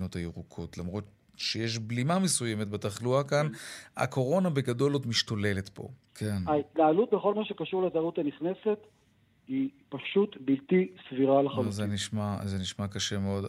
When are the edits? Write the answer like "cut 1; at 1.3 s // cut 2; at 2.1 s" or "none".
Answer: cut 1; at 6.1 s